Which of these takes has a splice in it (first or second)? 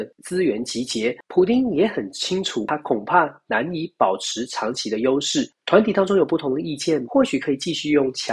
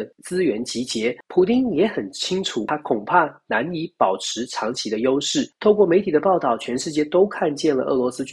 first